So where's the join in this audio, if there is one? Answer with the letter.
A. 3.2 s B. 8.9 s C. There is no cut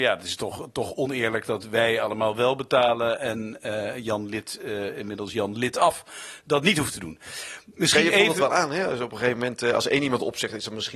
C